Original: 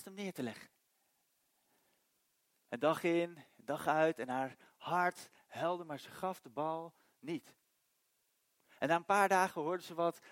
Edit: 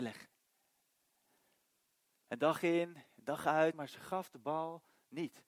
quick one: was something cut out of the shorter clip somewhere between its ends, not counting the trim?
yes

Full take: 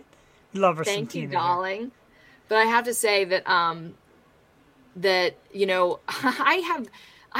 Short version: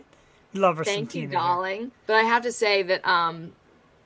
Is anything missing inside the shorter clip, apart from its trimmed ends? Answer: yes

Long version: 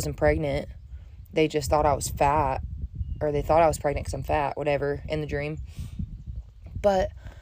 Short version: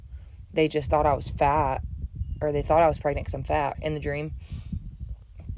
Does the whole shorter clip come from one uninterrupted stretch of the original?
no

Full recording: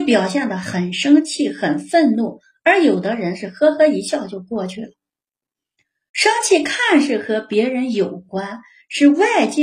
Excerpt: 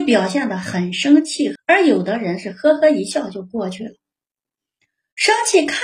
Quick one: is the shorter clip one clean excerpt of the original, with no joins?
no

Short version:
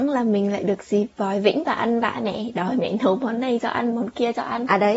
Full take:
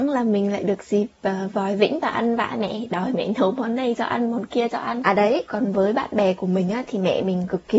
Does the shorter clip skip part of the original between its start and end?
yes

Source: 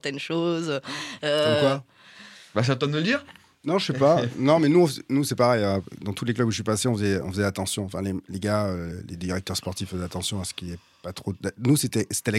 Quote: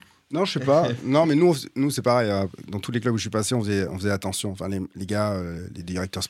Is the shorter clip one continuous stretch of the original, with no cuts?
yes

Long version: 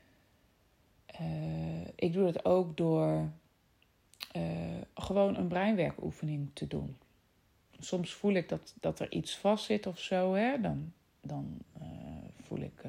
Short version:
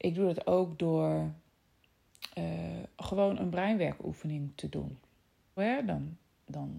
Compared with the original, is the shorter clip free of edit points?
no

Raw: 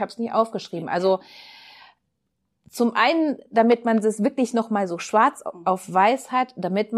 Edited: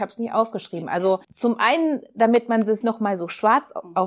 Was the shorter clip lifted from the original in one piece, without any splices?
no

